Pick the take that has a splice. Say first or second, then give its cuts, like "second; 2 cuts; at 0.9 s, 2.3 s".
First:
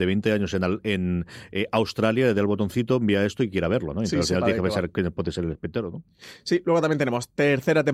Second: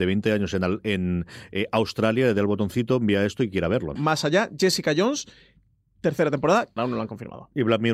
second; 2 cuts; at 4.0 s, 6.8 s